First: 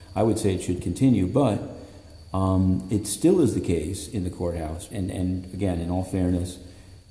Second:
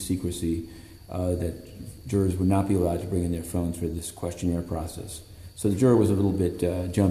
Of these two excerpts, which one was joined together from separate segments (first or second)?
first